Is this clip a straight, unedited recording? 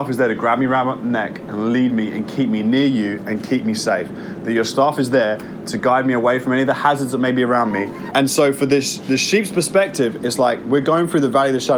no; 1 cut; at 8.1 s

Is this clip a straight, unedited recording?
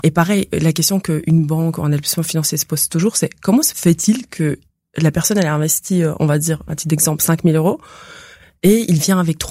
yes; 0 cuts

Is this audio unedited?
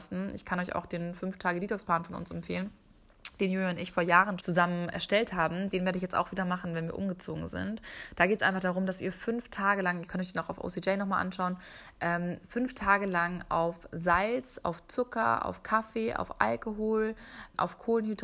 no; 1 cut; at 4.4 s

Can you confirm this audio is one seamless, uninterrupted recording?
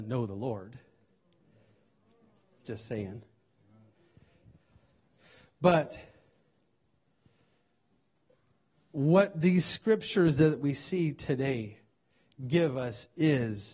yes; 0 cuts

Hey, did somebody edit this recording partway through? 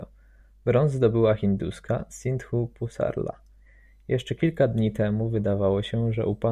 no; 0 cuts

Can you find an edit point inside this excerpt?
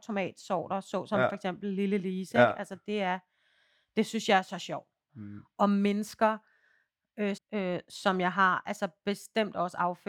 yes; 2 cuts; at 5.1 s, 7.4 s

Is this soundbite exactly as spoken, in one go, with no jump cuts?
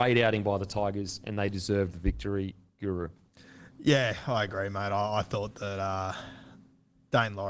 yes; 0 cuts

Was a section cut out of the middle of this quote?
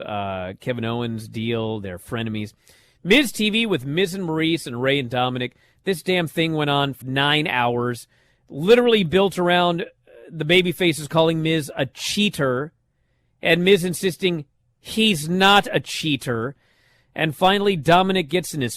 yes; 1 cut; at 7.0 s

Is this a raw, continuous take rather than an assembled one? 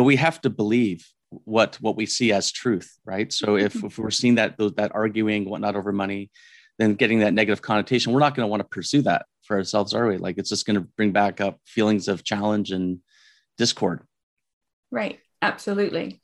yes; 0 cuts

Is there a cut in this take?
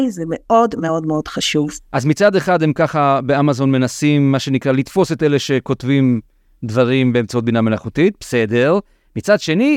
no; 0 cuts

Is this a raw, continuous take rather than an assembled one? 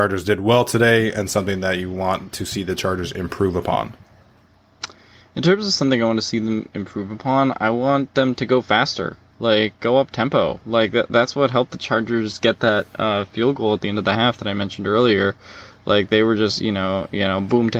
yes; 0 cuts

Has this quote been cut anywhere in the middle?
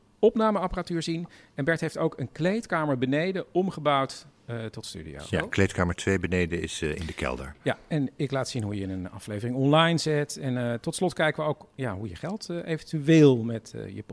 no; 0 cuts

